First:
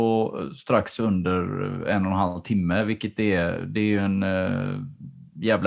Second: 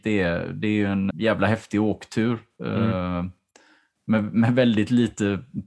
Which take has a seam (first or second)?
second